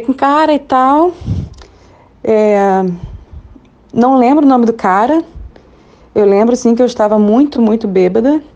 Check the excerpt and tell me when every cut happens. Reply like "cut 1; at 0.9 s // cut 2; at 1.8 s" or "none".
cut 1; at 7.5 s